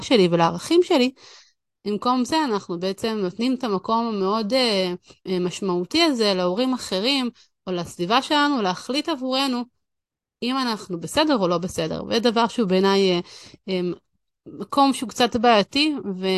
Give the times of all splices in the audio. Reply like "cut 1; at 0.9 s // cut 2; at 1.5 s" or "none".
cut 1; at 5.3 s